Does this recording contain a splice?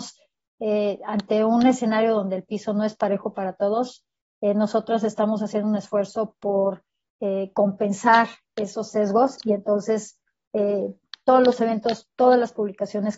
no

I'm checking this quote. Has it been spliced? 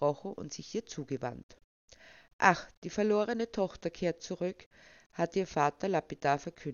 no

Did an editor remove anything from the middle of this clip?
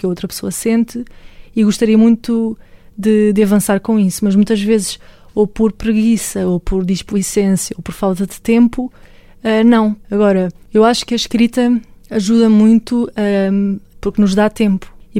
yes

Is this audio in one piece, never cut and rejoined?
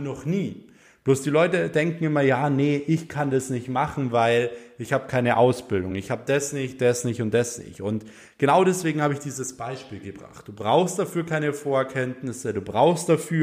yes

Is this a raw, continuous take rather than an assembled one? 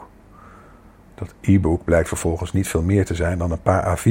yes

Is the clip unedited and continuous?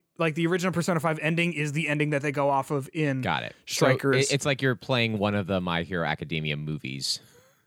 yes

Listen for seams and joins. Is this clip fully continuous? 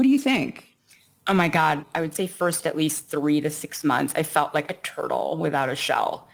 yes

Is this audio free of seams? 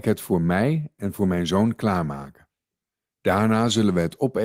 yes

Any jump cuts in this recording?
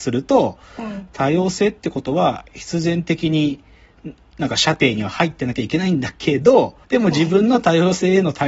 yes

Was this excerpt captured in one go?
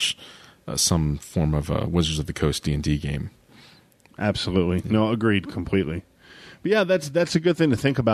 yes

